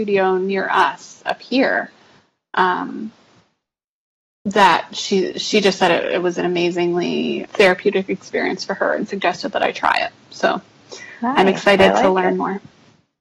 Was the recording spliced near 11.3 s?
no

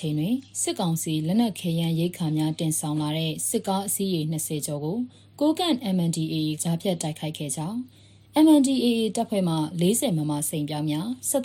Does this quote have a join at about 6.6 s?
yes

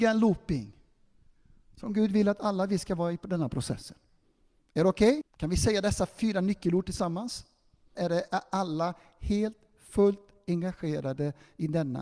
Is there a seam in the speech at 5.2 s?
yes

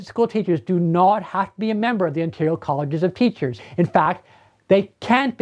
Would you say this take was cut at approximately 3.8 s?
no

